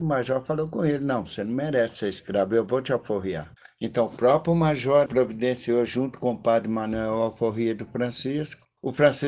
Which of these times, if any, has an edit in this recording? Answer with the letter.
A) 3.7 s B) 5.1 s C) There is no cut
B